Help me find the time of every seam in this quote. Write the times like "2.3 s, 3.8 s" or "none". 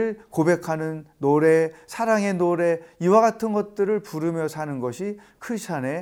none